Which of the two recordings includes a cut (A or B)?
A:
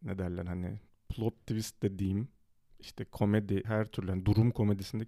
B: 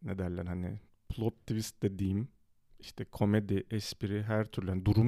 A